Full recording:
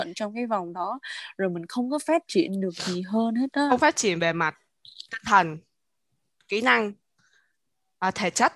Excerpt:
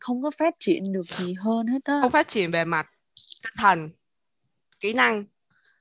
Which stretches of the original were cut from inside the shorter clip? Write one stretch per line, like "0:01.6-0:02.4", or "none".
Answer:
none